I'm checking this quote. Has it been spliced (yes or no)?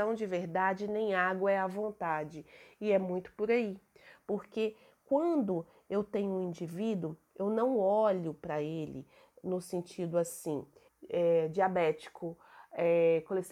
yes